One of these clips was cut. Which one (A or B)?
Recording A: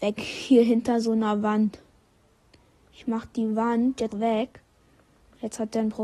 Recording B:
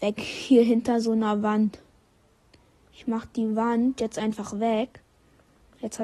A